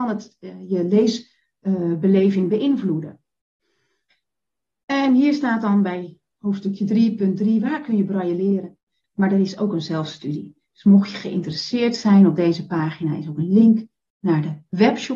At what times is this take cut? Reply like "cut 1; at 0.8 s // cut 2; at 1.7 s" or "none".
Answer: cut 1; at 9.0 s